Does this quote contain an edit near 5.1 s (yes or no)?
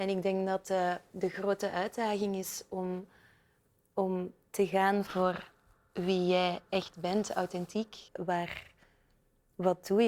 yes